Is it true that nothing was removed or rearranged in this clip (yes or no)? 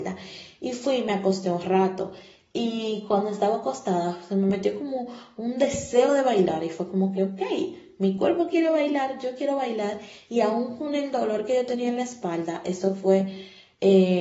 yes